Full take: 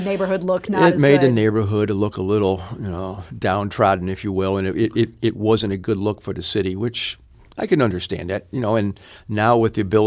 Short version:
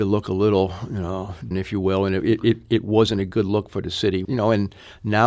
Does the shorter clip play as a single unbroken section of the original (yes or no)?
no